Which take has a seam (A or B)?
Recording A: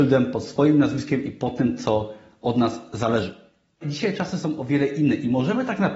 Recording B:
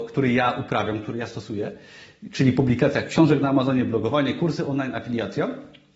A